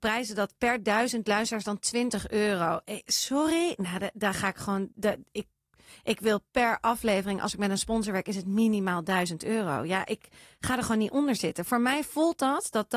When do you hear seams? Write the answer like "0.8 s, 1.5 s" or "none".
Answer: 4.9 s